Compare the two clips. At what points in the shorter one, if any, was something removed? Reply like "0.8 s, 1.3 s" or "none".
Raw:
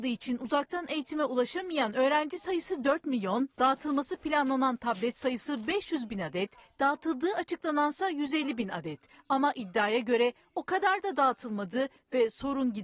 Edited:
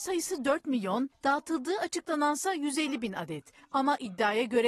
1.1 s